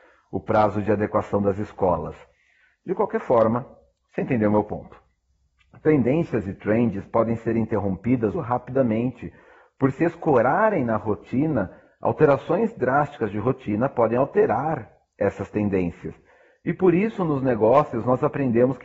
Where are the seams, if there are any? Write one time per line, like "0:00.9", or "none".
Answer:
0:08.3